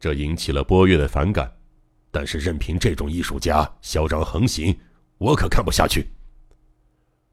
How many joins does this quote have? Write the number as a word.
one